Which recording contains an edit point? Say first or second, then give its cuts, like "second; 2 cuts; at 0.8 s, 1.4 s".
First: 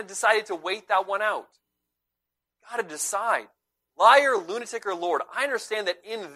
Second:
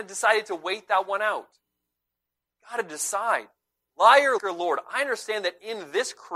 second; 1 cut; at 4.4 s